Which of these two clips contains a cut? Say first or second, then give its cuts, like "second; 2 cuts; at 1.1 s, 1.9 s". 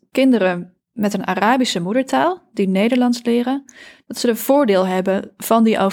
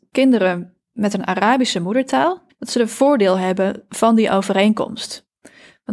second; 1 cut; at 2.5 s